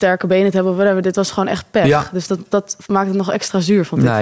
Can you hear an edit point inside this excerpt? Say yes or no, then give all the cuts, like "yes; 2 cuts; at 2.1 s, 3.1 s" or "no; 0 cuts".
no; 0 cuts